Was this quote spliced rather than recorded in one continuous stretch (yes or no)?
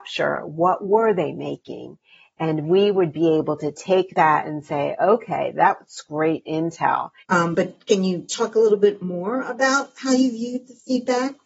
yes